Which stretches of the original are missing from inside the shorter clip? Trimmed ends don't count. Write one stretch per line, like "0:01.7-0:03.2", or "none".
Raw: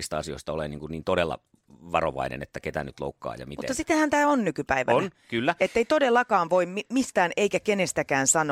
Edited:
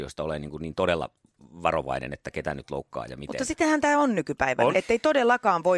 0:05.0-0:05.6